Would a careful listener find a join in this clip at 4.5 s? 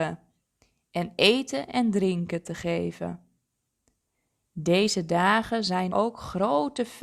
no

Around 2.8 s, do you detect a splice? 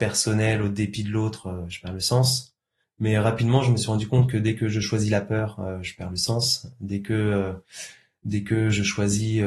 yes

